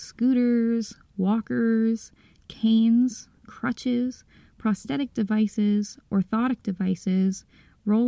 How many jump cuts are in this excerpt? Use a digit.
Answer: 0